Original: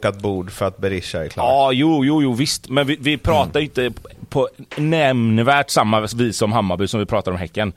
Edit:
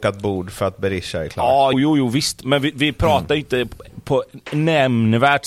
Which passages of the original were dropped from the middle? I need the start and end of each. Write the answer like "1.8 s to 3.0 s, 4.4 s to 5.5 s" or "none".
1.7 s to 2.0 s